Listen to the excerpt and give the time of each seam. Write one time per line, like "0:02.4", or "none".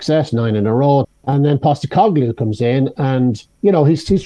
0:01.0